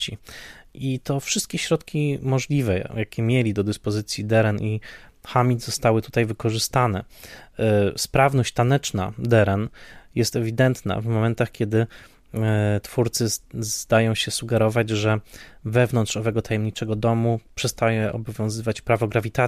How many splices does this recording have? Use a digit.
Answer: 0